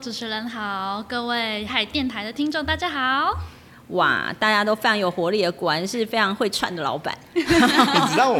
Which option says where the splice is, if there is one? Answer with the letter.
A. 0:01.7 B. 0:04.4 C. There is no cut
A